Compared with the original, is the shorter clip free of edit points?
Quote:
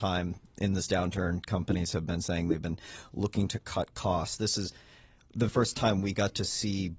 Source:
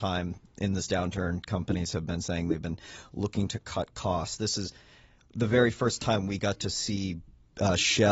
no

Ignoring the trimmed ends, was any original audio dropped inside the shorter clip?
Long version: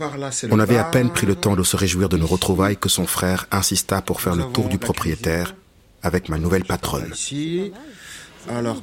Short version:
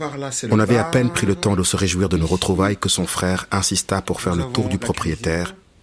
no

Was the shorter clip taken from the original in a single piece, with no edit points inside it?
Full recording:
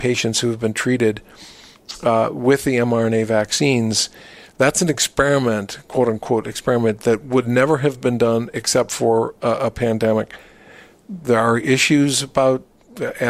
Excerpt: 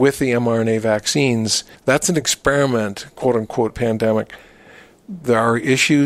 no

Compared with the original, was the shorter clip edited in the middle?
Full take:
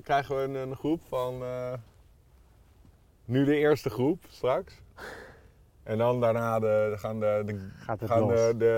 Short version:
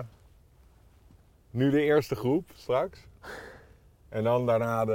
no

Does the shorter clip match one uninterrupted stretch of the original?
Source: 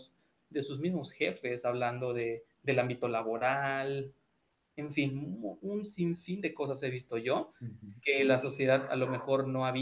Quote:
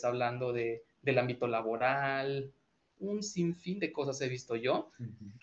no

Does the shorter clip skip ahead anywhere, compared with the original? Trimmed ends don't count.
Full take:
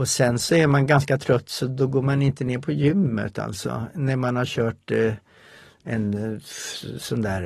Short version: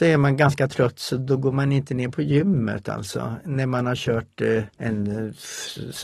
yes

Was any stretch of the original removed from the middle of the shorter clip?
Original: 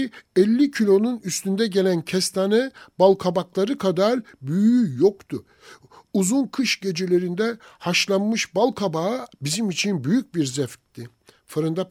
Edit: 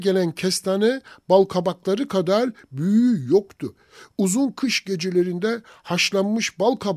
yes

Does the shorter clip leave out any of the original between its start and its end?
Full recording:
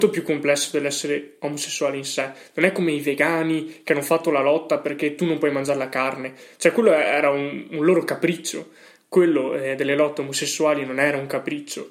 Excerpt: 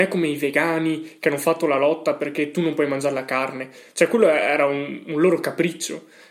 no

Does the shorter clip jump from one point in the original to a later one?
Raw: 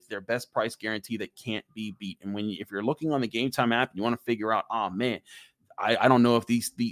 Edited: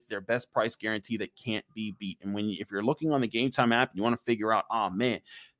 no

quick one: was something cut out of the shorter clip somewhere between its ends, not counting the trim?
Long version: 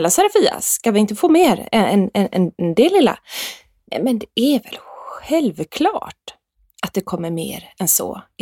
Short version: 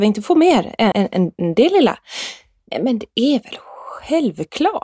yes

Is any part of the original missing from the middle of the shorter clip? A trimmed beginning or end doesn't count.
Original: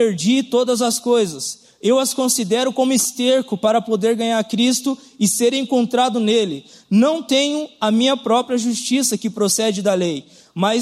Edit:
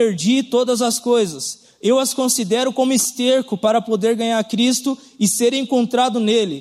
no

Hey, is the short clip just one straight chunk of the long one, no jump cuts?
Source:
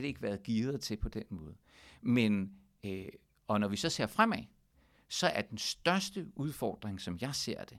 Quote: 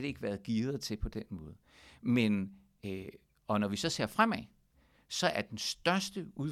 yes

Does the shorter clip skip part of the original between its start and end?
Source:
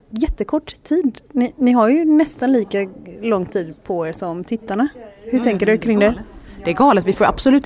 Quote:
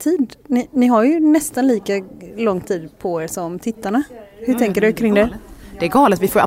no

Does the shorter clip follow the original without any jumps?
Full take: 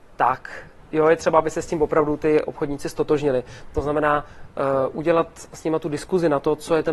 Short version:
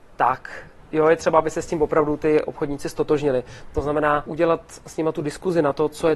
no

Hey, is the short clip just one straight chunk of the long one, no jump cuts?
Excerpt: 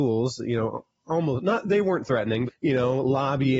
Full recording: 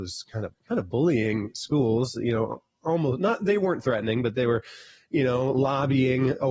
no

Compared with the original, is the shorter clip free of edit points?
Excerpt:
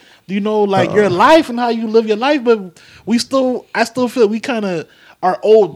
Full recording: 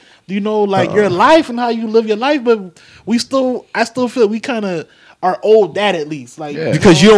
yes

